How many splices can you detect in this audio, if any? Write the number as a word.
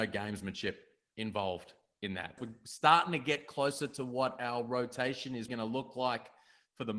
two